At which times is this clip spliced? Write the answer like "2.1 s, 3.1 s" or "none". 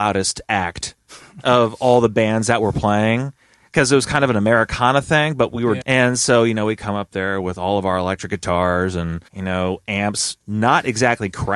5.8 s, 9.3 s